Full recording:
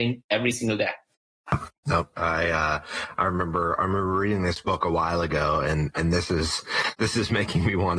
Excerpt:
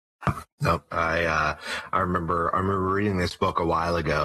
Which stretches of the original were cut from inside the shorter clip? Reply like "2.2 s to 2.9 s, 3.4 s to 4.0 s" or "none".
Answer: none

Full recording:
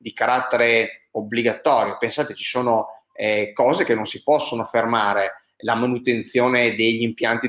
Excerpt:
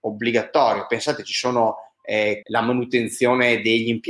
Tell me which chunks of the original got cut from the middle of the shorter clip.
3.5 s to 5.6 s

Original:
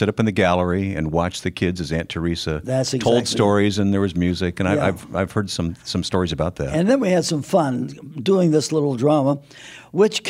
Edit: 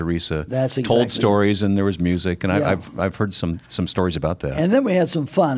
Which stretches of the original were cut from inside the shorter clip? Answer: none

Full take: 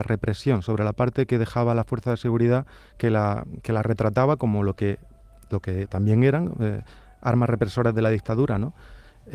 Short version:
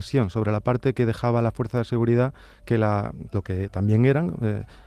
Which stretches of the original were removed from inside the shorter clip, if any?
3.6 s to 5.5 s

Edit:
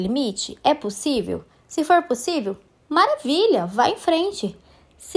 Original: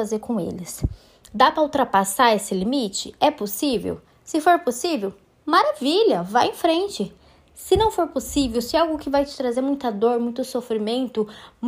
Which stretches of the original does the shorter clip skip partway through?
none

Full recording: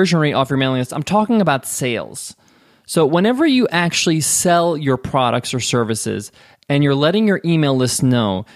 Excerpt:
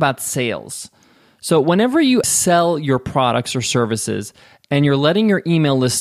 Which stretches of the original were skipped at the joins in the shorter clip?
3.7 s to 4.2 s

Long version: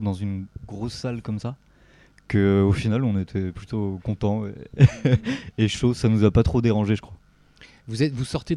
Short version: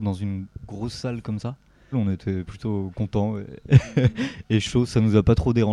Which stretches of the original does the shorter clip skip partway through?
1.9 s to 3.0 s

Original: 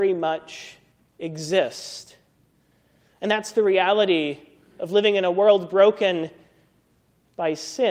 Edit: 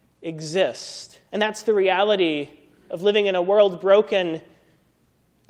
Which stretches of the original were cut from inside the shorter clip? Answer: 2.2 s to 3.2 s

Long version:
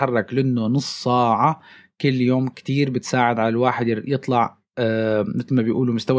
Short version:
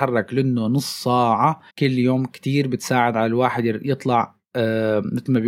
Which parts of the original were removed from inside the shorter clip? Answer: 1.7 s to 1.9 s

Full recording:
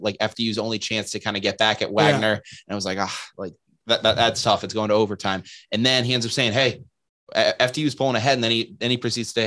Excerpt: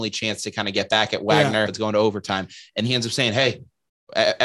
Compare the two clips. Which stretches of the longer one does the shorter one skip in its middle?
2.3 s to 4.6 s, 5.8 s to 6.0 s

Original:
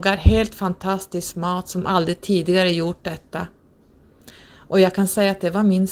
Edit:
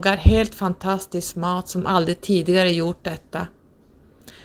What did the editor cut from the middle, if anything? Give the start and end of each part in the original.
none

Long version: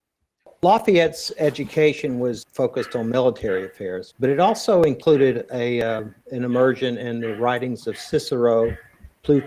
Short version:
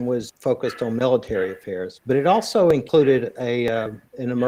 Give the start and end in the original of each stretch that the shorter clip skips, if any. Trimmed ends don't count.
none

